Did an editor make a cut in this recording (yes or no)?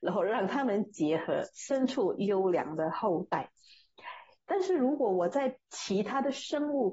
yes